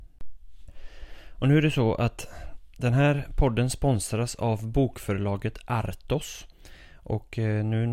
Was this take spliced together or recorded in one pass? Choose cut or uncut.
uncut